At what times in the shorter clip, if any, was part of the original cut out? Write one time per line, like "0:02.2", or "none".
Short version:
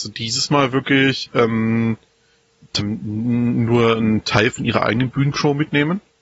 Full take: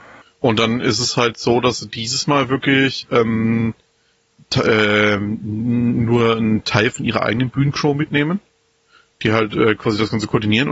0:02.8